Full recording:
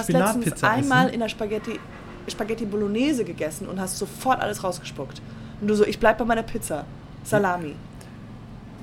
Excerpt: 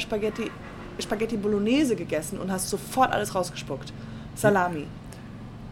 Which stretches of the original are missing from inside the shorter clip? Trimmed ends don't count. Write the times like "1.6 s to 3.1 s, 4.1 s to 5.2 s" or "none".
5.6 s to 7.2 s